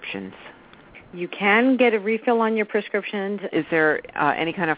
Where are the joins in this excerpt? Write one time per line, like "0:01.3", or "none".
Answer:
0:03.5